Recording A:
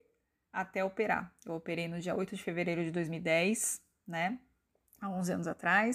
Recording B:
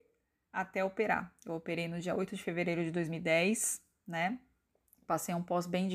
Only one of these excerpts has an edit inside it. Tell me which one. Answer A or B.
B